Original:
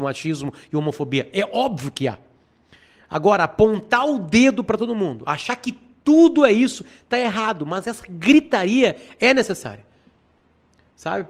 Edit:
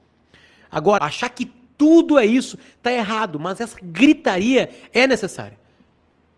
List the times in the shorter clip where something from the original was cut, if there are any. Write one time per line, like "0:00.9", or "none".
0:01.0

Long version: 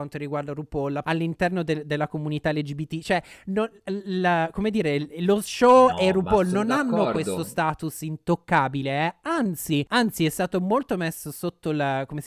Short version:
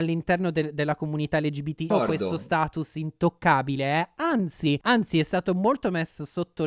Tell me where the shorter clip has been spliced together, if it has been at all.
0:01.9

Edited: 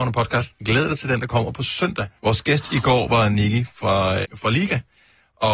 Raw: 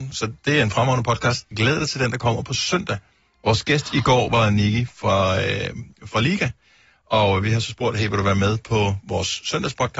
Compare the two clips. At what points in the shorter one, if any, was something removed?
0:02.2
0:04.2

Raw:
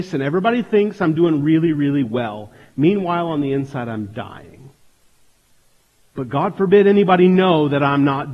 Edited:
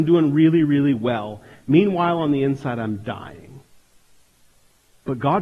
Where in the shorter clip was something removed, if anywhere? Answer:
none

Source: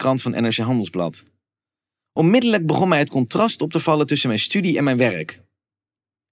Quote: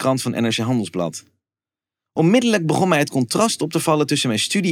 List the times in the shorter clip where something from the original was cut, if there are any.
none

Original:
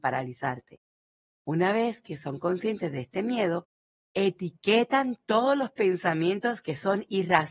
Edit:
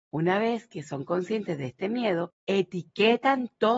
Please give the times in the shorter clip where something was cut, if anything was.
0:02.4

